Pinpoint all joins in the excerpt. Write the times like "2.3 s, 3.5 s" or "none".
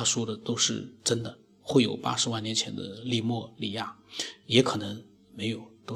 none